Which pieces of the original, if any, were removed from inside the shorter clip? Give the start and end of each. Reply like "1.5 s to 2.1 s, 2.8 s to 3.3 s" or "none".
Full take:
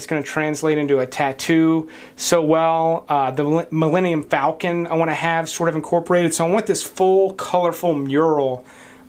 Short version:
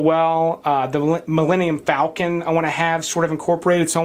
none